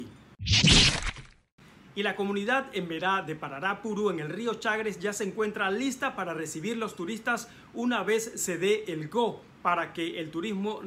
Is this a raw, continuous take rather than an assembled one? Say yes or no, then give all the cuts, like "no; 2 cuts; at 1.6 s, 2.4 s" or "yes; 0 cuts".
yes; 0 cuts